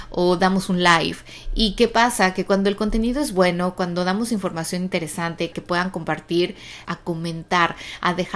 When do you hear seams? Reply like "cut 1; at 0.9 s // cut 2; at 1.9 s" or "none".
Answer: cut 1; at 5.5 s // cut 2; at 6.8 s